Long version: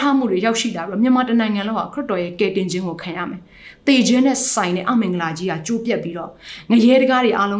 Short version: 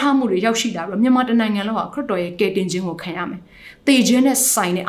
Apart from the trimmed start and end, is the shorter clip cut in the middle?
no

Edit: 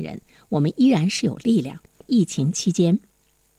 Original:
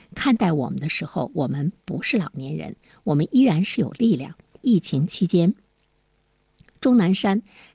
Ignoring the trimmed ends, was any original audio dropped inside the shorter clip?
no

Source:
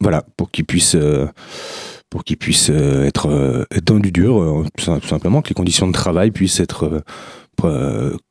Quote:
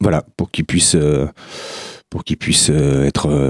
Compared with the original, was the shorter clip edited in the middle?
no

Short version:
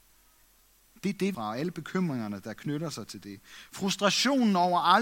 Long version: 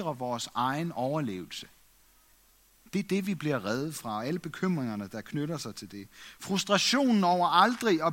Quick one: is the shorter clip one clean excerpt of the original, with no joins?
no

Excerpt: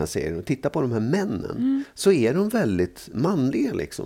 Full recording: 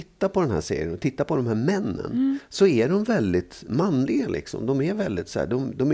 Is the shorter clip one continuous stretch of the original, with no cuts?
yes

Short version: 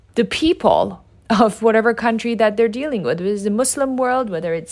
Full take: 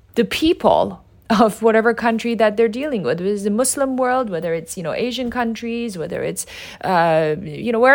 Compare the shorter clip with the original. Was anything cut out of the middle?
no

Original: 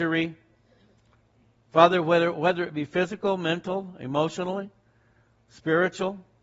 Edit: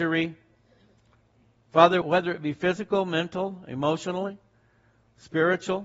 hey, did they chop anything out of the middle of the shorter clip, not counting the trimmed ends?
yes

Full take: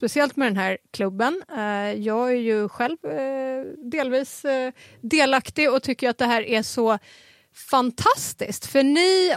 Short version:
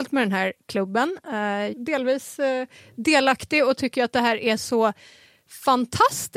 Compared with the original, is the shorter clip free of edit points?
no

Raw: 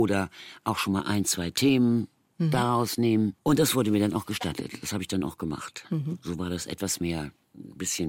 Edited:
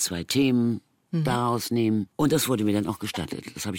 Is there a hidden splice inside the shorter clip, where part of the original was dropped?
no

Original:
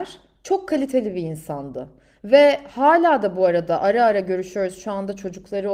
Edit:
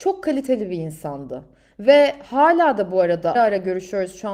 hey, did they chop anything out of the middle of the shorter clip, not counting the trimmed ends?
yes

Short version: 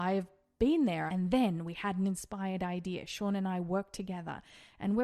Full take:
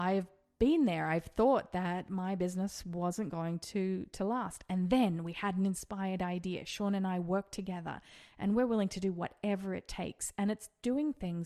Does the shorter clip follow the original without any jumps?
no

